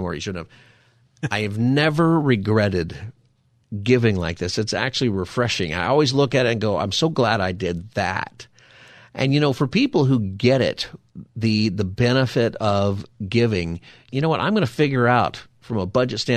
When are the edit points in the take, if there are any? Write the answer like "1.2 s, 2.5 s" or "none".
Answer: 14.1 s

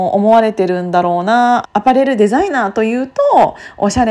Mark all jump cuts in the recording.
1.6 s

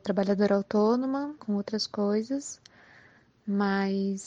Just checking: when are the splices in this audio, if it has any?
1.4 s

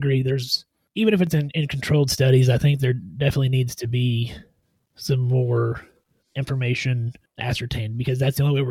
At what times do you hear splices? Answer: none

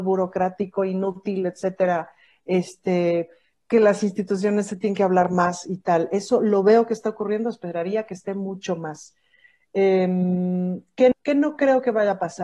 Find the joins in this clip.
11.1 s

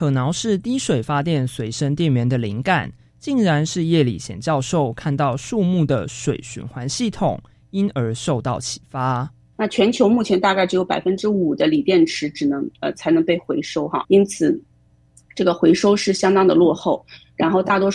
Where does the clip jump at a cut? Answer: 9.5 s, 14.0 s

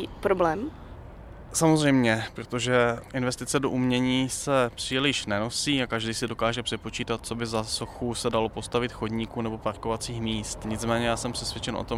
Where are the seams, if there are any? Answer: none

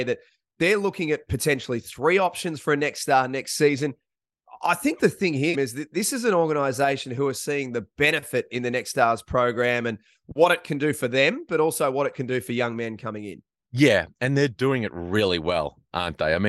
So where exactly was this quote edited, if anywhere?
5.5 s

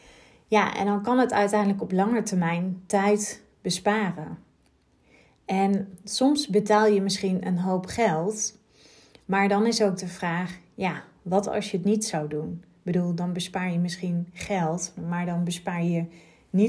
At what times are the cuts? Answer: none

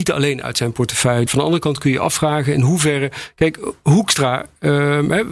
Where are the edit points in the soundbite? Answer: 1.3 s

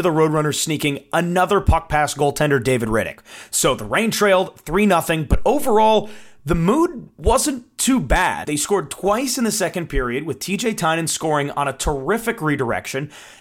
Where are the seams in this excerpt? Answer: 8.4 s

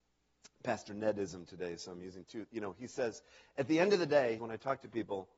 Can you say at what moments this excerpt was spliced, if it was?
4.4 s

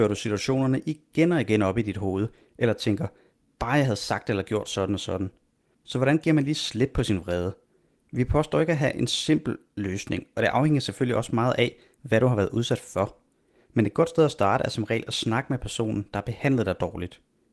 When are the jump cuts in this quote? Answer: 5.7 s

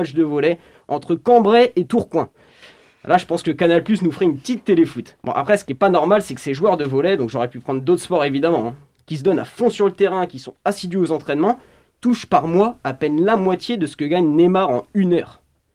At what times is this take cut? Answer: 5.2 s

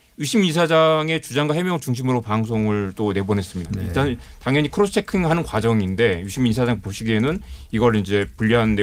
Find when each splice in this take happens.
3.6 s

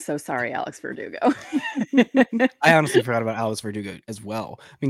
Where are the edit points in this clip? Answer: none

